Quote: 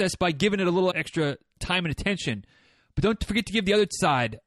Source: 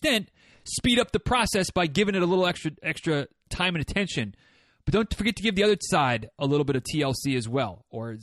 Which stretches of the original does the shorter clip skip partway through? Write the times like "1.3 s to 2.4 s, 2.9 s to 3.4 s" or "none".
2.5 s to 2.8 s